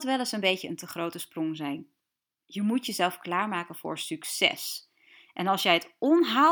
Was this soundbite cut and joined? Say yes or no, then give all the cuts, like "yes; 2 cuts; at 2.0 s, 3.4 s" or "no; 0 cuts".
no; 0 cuts